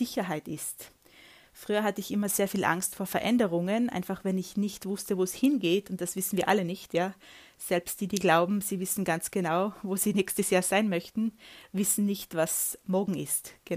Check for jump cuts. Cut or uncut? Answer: uncut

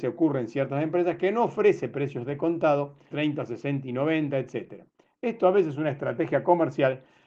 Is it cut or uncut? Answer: cut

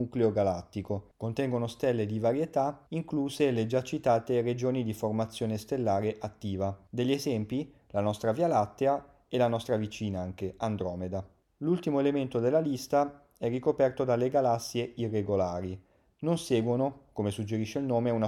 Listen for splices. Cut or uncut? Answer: uncut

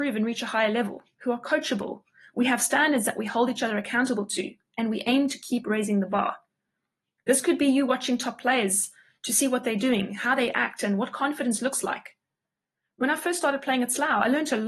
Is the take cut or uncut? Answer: uncut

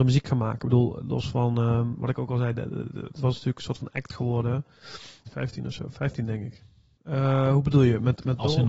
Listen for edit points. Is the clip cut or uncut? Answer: cut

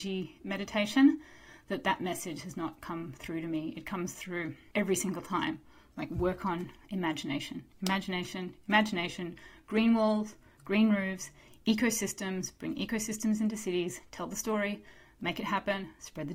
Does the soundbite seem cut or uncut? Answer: uncut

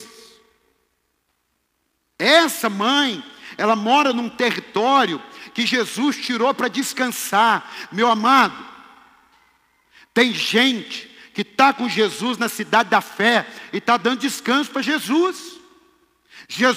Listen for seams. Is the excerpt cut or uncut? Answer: uncut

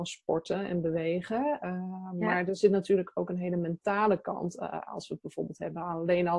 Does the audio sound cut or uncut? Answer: uncut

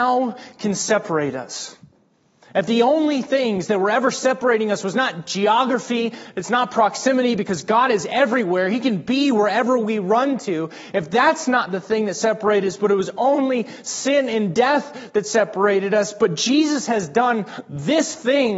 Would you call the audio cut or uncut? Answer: uncut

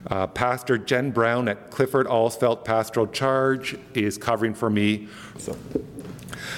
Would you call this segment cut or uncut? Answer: cut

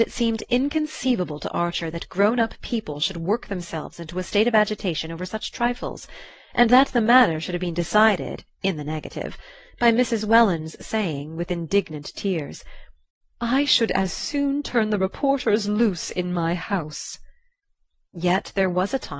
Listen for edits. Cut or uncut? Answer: uncut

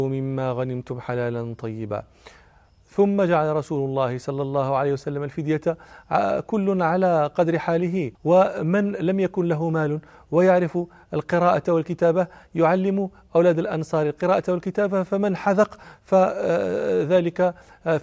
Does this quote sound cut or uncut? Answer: cut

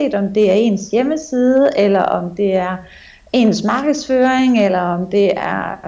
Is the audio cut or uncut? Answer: uncut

